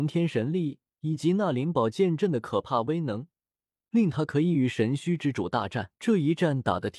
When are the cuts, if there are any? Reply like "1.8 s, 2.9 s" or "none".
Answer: 6.0 s